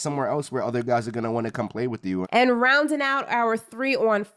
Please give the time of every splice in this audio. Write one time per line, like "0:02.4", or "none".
0:02.2